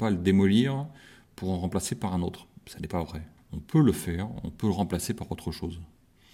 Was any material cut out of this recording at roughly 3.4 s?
yes; 1 cut; at 3.4 s

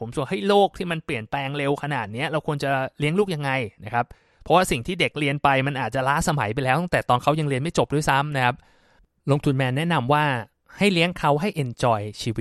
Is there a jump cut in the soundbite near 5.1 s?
yes; 1 cut; at 5.1 s

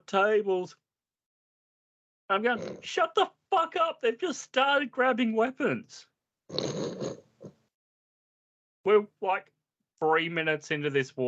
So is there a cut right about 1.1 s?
no; 0 cuts

